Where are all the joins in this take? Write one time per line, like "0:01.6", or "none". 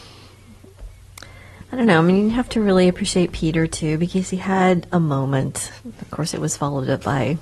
none